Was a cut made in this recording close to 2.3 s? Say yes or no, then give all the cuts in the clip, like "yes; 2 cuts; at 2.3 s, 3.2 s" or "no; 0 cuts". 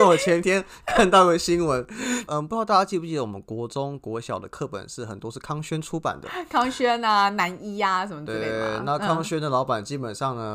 yes; 1 cut; at 2.3 s